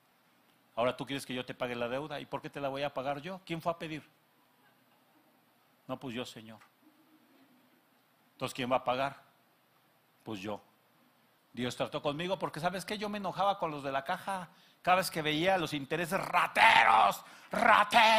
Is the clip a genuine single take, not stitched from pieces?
no; 1 cut; at 11.4 s

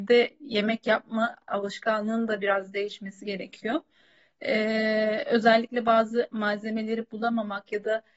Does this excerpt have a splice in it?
no; 0 cuts

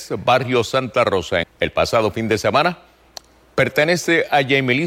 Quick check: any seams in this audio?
yes; 1 cut; at 1.4 s

